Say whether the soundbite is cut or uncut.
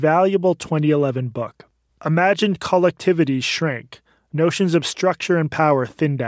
cut